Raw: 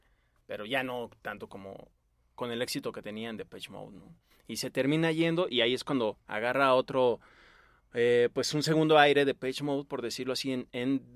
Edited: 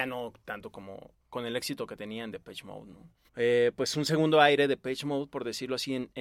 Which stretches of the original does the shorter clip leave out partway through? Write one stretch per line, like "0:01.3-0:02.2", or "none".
0:02.0-0:02.3
0:04.3-0:07.8